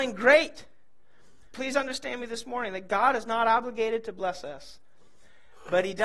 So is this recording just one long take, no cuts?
no; 1 cut; at 1.5 s

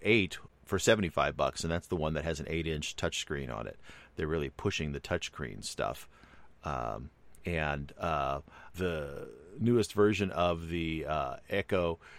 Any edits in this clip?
yes; 2 cuts; at 7.4 s, 8.7 s

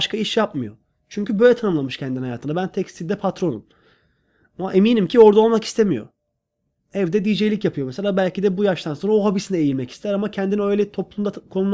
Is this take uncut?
yes; 0 cuts

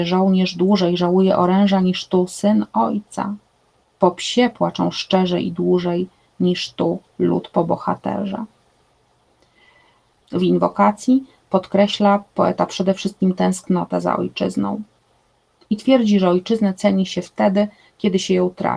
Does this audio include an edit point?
yes; 1 cut; at 10.1 s

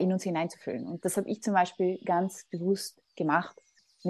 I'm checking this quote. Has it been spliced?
no; 0 cuts

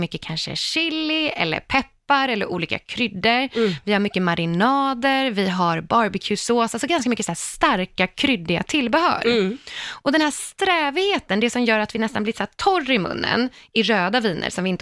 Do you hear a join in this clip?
no; 0 cuts

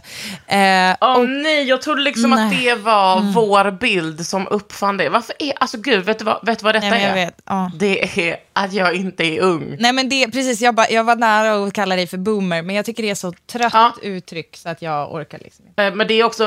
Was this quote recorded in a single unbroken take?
yes; 0 cuts

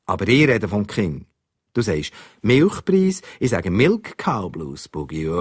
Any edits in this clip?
no; 0 cuts

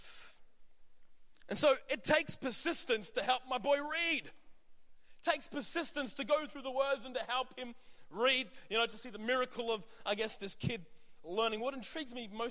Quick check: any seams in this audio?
no; 0 cuts

